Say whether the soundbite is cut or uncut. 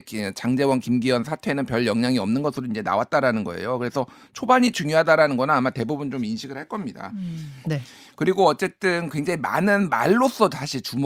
cut